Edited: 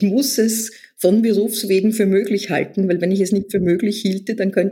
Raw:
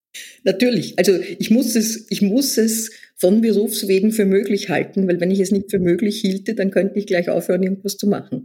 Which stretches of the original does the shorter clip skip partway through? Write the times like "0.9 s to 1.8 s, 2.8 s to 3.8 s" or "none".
none